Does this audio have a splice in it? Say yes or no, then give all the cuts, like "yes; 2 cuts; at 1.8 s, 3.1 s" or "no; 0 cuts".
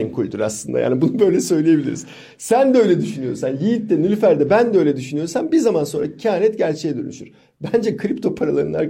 no; 0 cuts